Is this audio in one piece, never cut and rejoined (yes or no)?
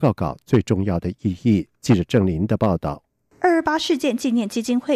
yes